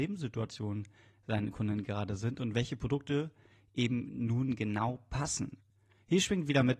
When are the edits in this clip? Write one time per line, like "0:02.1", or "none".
none